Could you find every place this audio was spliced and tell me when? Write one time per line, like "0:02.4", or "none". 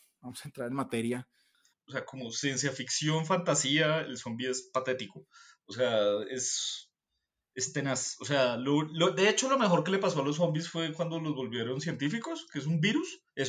0:01.7